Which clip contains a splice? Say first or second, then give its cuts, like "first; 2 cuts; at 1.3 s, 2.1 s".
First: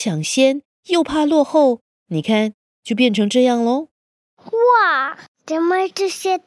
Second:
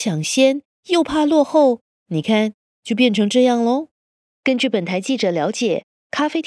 second; 1 cut; at 4.3 s